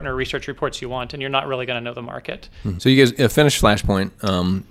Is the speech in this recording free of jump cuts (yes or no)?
no